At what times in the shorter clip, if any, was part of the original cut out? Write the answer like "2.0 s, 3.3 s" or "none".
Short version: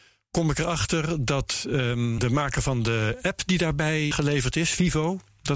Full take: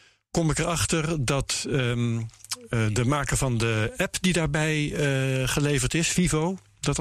2.2 s, 4.1 s